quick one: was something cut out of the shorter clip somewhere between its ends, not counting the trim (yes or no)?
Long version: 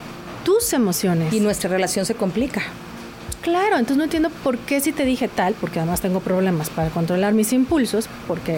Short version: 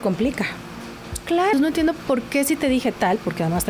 yes